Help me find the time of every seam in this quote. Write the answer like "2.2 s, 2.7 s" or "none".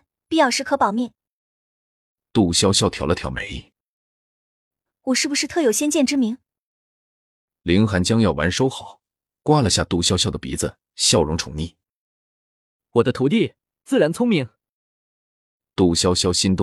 none